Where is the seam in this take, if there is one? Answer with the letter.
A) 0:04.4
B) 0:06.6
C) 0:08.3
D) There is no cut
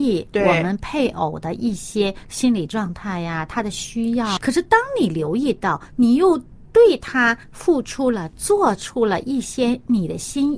A